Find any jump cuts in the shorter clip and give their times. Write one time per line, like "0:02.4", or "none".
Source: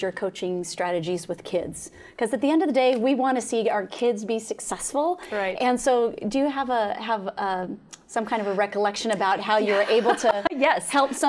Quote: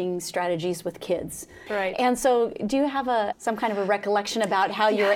0:01.7
0:03.3

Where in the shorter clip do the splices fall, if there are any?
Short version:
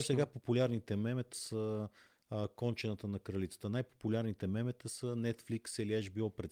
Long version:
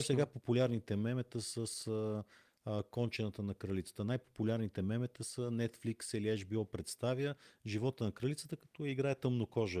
0:01.3

